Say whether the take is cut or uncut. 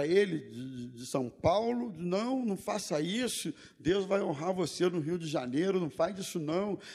uncut